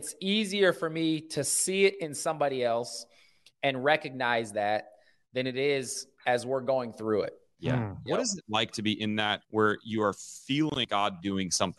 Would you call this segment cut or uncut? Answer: cut